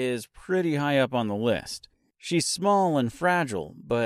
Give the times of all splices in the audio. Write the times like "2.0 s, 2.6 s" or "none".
none